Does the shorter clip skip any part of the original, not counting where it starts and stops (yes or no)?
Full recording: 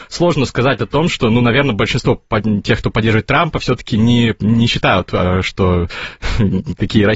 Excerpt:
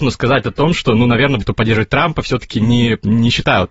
yes